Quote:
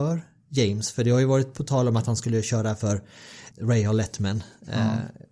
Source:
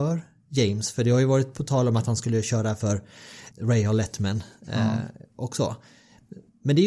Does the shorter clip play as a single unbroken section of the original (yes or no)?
yes